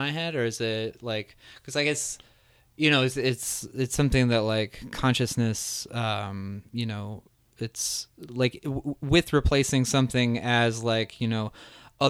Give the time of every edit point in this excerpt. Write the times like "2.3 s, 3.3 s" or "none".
none

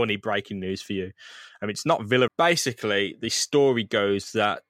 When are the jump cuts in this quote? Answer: 2.3 s

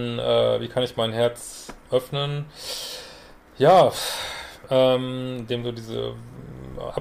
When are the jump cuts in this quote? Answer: none

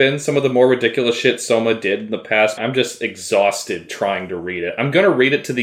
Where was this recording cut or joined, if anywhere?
2.6 s

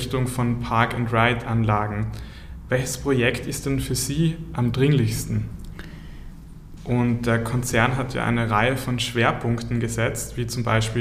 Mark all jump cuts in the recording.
6.8 s

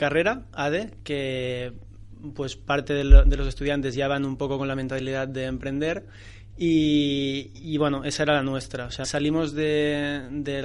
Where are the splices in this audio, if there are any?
9.0 s

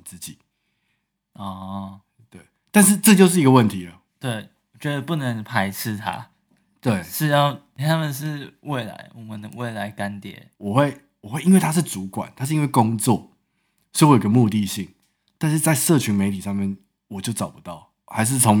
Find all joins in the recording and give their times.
4.1 s, 7.8 s, 10.5 s

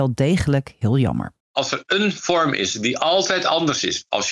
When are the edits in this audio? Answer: 1.4 s

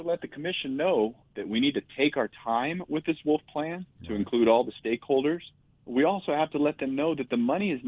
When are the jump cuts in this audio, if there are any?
none

